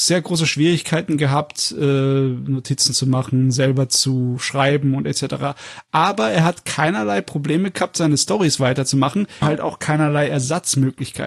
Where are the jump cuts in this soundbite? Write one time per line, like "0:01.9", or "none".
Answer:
0:09.4